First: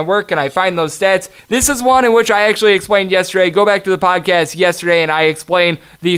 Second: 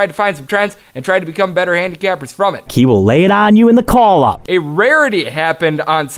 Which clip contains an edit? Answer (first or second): second